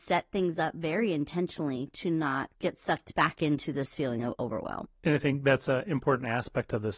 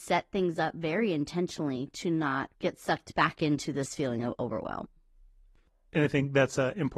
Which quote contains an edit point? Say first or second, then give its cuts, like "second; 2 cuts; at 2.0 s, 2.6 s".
first; 1 cut; at 4.9 s